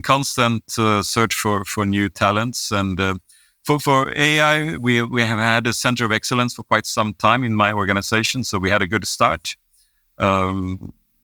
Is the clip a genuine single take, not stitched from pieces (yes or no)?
yes